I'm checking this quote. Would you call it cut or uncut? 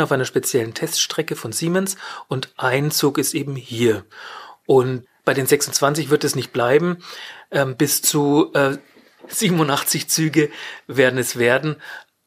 uncut